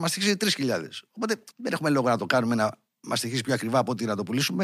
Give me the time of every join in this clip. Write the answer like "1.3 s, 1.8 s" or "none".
1.5 s